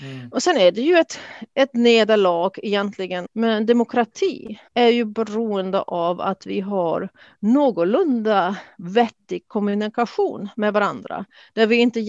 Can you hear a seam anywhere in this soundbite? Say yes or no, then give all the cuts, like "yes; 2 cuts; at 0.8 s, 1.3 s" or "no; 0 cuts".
yes; 2 cuts; at 3.3 s, 4.7 s